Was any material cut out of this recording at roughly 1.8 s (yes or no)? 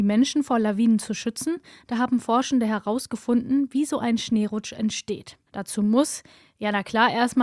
no